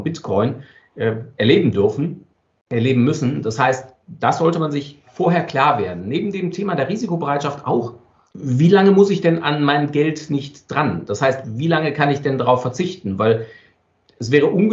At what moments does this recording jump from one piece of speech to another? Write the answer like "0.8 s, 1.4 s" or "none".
none